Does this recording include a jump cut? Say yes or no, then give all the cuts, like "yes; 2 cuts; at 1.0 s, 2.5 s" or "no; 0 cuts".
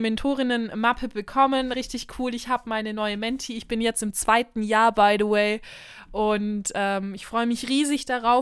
no; 0 cuts